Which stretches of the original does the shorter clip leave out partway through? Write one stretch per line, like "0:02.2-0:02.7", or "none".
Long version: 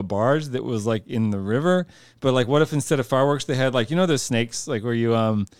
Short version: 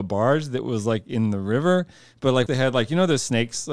0:02.5-0:03.5

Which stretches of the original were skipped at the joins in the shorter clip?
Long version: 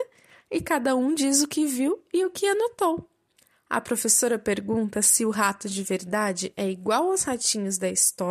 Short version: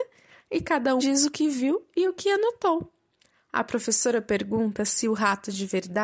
0:01.0-0:01.2

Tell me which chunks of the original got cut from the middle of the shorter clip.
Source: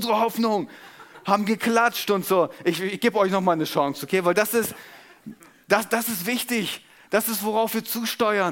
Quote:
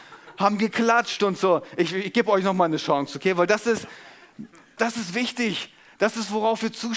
0:05.6-0:05.9

